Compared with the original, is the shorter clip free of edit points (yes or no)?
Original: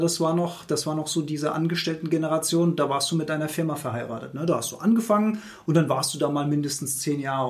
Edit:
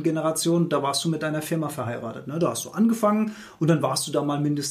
yes